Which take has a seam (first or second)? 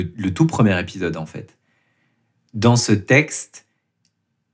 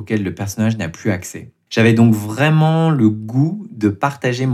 second